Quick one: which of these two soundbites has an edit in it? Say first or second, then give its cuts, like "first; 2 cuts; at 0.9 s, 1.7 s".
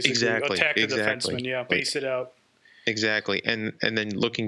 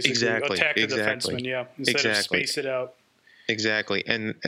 first; 1 cut; at 1.7 s